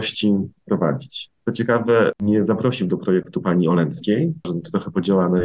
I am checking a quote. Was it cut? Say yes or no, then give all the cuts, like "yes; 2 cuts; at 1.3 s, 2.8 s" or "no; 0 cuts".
yes; 2 cuts; at 1.3 s, 4.4 s